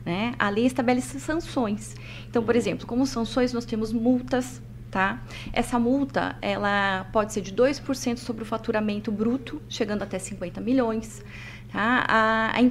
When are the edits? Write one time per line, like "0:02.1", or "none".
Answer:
none